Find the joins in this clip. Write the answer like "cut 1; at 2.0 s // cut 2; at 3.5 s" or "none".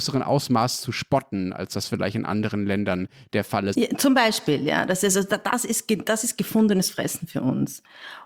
cut 1; at 3.7 s